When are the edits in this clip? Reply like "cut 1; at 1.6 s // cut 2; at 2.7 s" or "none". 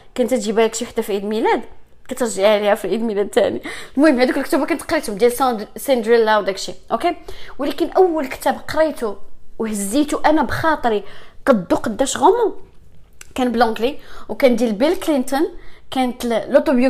none